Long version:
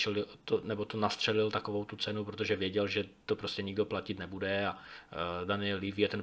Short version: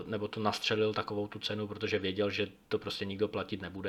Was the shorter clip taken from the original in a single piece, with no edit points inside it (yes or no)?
yes